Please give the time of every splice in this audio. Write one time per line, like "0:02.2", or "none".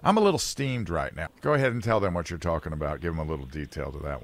0:01.3